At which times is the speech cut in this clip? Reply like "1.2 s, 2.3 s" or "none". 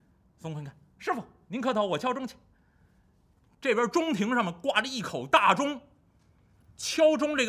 none